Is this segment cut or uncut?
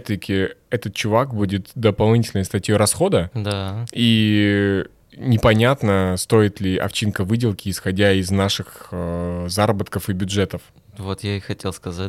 uncut